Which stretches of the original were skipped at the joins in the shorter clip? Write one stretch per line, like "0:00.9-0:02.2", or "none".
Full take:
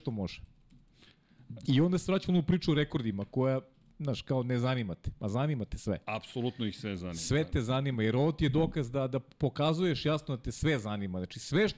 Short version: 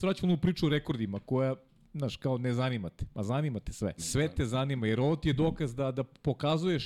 0:06.0-0:07.1